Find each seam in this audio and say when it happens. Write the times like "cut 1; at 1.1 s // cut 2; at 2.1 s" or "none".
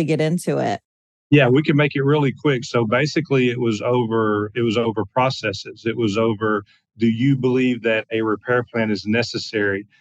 none